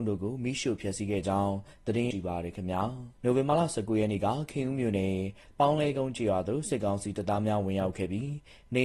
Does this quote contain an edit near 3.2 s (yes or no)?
yes